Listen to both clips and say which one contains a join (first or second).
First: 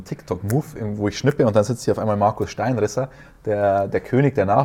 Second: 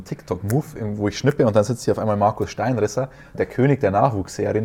second